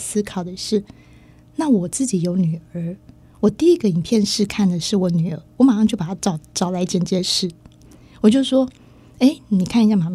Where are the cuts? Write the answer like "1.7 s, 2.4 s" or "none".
none